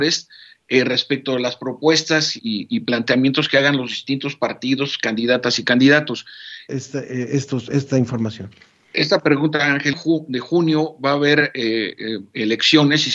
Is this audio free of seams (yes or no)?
no